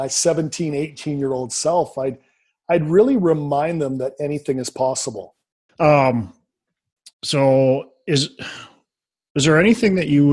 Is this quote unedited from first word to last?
no; 2 cuts; at 5.7 s, 7.1 s

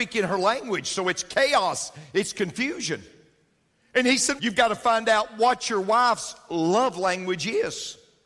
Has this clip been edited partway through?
yes; 1 cut; at 4.4 s

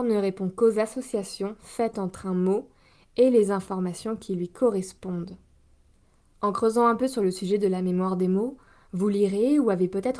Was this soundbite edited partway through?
no; 0 cuts

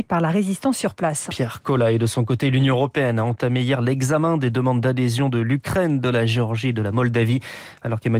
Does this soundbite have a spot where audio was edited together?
yes; 1 cut; at 1.3 s

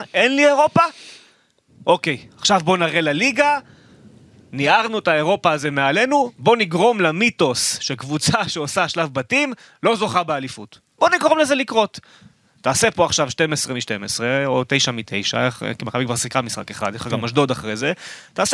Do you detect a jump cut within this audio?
no; 0 cuts

